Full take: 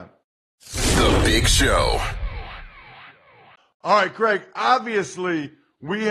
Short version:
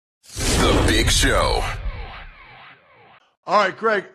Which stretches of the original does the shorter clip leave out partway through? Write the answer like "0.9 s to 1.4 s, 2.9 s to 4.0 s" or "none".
none